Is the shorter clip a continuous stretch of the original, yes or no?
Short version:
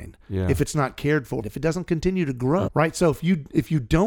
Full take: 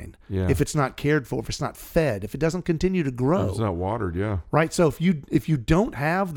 no